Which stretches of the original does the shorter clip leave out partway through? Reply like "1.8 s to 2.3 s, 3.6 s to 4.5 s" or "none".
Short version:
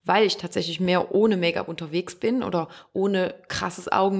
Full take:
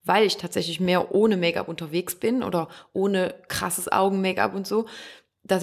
none